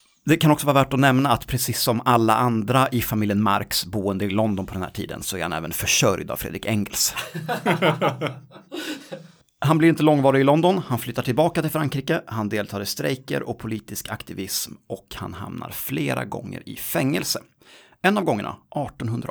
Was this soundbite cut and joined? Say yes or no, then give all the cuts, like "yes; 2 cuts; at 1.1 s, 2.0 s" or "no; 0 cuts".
no; 0 cuts